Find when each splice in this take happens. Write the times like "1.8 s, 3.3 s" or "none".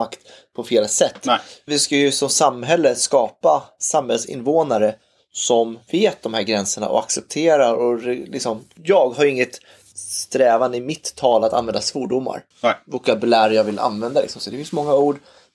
12.5 s